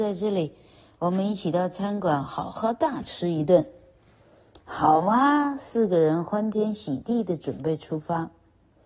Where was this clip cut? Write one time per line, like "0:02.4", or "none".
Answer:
none